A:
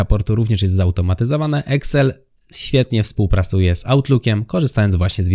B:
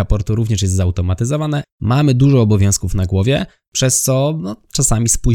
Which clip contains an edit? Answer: B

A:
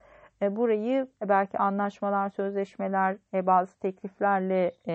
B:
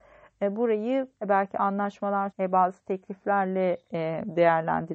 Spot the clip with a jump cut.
B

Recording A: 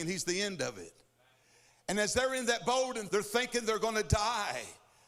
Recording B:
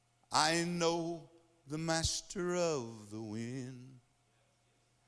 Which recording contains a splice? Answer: A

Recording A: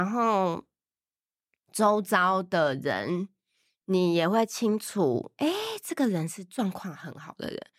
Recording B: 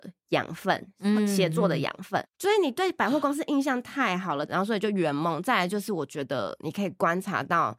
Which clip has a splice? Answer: B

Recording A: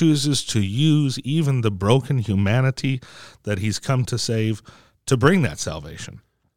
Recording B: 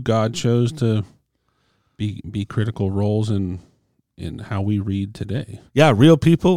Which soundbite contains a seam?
B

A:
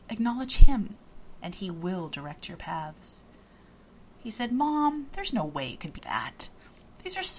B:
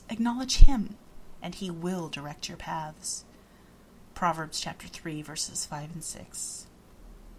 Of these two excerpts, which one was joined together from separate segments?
A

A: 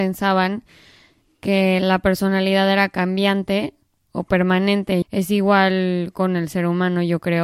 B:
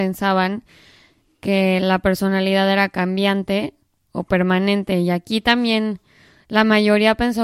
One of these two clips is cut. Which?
A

